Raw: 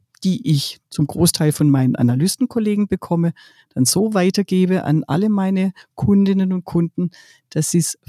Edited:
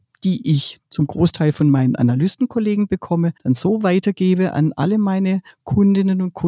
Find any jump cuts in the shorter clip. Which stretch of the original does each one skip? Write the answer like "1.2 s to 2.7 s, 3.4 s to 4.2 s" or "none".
3.4 s to 3.7 s